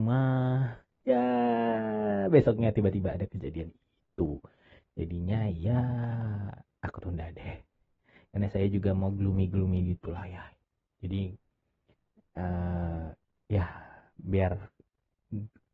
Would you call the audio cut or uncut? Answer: uncut